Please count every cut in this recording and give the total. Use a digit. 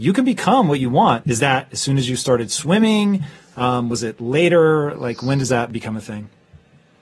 1